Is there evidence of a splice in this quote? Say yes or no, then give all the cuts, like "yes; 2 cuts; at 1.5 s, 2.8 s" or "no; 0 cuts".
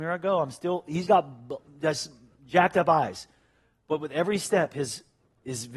yes; 1 cut; at 1.1 s